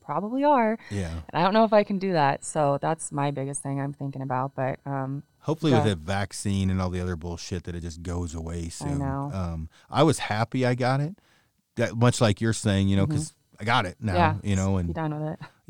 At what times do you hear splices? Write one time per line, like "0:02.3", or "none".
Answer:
none